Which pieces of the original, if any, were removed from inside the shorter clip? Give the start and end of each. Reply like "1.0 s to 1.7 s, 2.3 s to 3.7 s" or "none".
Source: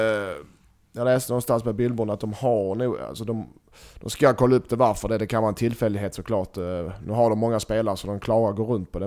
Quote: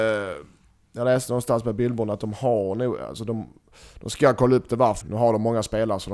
5.0 s to 7.0 s